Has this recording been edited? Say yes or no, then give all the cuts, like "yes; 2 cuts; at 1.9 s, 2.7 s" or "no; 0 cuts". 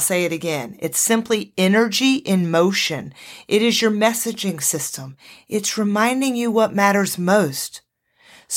no; 0 cuts